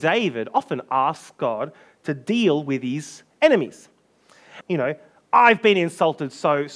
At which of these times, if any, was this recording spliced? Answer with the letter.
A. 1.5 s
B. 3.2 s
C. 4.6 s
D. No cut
C